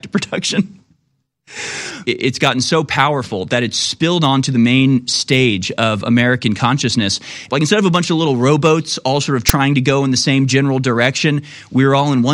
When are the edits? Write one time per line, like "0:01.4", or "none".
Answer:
0:02.0
0:07.5